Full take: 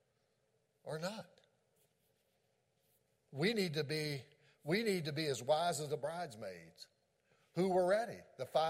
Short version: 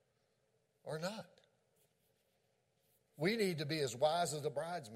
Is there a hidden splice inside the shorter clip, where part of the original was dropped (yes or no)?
yes